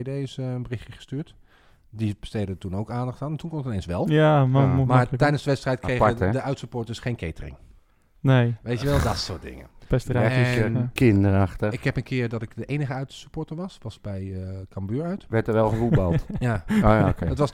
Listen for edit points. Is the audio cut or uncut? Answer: uncut